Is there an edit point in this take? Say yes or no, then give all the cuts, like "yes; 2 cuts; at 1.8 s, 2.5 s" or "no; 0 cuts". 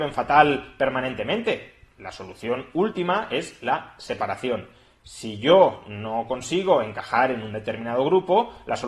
no; 0 cuts